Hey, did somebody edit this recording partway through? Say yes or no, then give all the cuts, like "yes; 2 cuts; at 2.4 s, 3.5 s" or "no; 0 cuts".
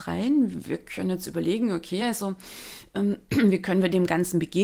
no; 0 cuts